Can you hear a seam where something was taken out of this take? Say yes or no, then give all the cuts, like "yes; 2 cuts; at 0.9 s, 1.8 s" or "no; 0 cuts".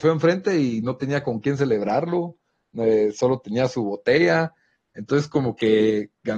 yes; 1 cut; at 4.8 s